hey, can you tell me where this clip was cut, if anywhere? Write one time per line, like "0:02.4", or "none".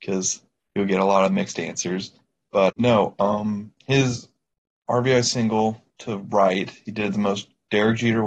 0:02.7
0:03.8